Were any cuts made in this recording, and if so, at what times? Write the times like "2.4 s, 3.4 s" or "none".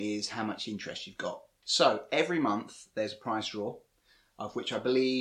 none